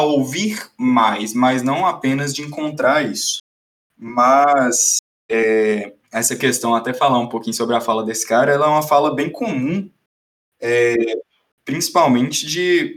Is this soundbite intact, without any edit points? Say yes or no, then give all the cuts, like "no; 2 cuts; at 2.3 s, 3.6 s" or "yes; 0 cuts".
no; 1 cut; at 6.0 s